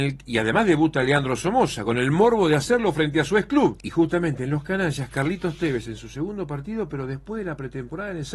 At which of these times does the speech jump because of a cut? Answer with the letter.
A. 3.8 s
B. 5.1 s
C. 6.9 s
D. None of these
A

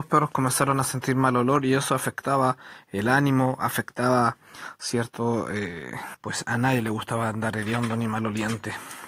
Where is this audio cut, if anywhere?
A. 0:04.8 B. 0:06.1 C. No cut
B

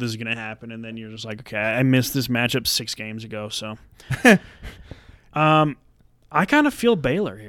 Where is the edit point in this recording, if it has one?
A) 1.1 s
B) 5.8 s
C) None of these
C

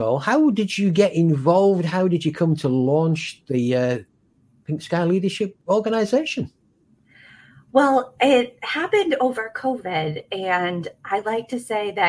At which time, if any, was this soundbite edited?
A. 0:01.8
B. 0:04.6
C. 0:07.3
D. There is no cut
D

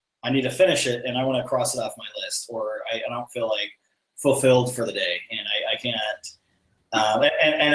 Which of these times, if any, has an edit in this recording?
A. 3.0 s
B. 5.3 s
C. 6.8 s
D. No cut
C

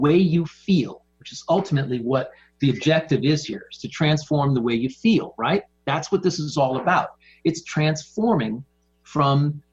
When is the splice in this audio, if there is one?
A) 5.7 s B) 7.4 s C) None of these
C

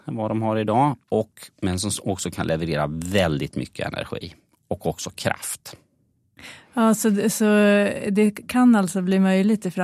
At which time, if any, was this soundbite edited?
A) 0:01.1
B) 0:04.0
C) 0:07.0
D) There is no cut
D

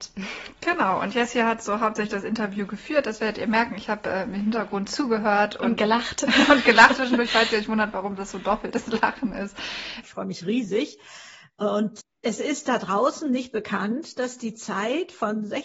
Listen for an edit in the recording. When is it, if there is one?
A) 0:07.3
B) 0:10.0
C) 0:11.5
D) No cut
B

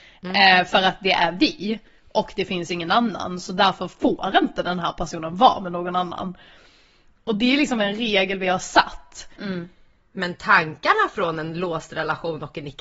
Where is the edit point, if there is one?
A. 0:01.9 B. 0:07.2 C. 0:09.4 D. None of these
C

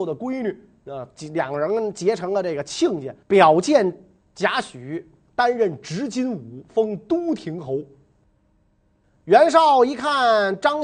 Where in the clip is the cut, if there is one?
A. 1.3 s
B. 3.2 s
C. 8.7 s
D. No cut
B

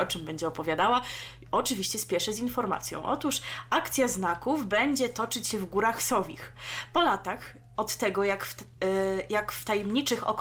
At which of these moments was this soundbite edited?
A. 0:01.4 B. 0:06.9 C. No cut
C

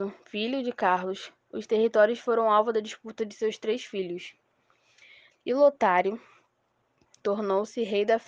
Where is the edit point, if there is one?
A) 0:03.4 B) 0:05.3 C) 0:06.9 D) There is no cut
B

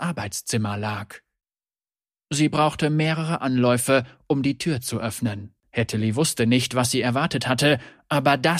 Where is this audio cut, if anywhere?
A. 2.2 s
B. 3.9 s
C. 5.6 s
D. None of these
C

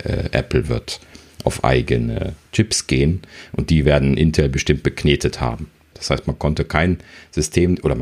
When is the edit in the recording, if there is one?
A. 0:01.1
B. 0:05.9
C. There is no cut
B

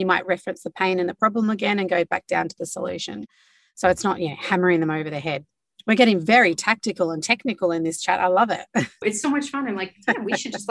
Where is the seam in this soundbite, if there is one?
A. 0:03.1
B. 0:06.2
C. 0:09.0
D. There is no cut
C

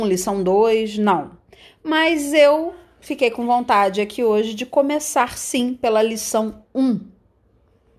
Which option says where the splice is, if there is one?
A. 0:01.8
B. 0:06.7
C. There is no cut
C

